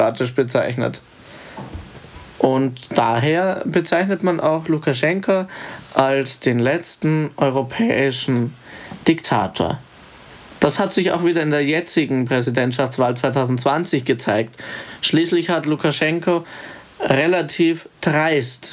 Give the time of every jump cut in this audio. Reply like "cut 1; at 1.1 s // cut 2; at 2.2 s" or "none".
none

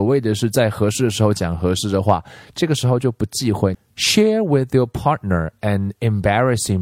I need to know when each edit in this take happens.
cut 1; at 3.7 s

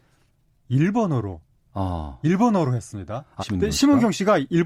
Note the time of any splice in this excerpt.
cut 1; at 3.4 s

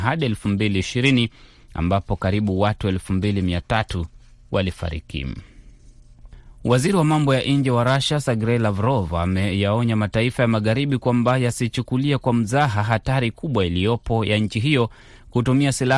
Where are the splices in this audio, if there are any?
none

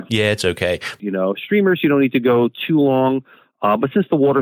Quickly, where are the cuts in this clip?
cut 1; at 1.0 s

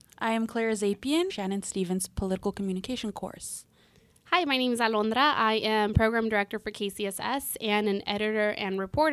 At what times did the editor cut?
cut 1; at 1.3 s

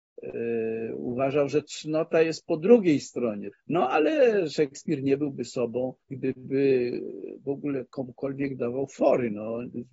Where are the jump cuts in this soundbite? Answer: cut 1; at 3.5 s // cut 2; at 6.0 s

